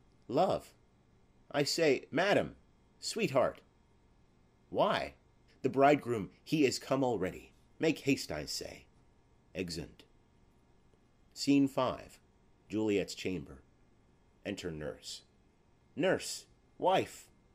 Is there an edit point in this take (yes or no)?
yes